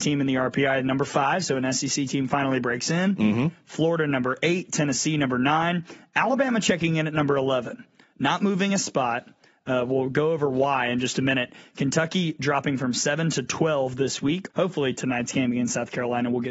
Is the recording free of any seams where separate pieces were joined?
no; 1 cut; at 14.5 s

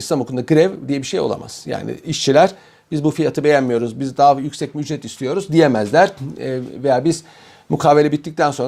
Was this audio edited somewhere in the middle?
no; 0 cuts

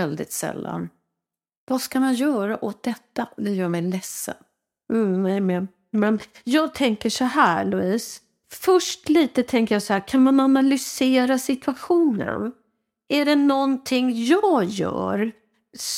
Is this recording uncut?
yes; 0 cuts

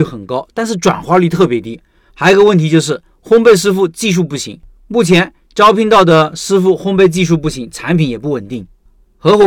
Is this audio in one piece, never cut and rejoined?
no; 1 cut; at 2.1 s

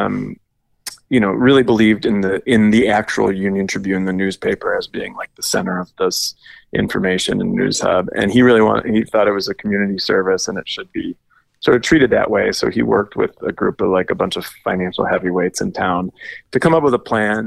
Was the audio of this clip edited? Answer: no; 0 cuts

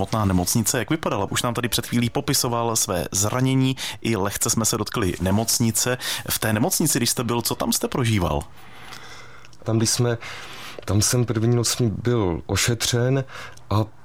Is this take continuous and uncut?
no; 2 cuts; at 1.3 s, 9.6 s

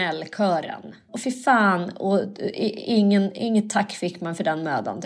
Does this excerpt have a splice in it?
yes; 1 cut; at 1.1 s

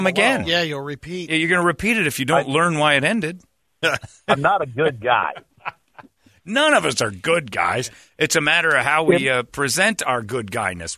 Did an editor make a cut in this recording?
yes; 1 cut; at 3.8 s

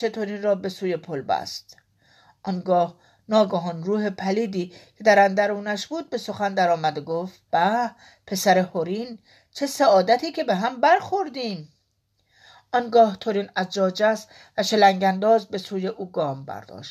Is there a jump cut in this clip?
yes; 1 cut; at 7.5 s

